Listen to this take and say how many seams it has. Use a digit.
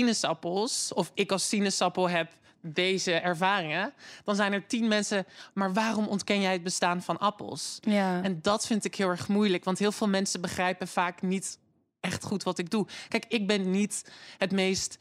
0